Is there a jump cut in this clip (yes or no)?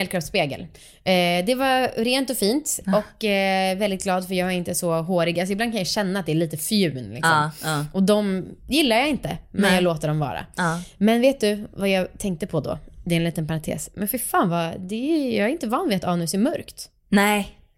no